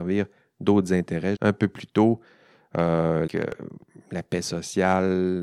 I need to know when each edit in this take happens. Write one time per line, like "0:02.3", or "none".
0:01.4
0:03.3